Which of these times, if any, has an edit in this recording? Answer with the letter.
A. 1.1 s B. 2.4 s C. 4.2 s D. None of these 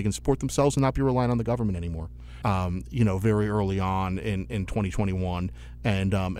B